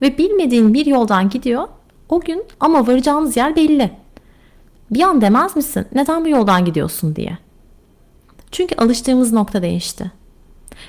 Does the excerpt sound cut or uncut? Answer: uncut